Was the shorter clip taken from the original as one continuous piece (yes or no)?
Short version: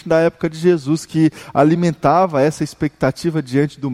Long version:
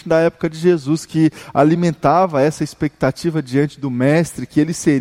yes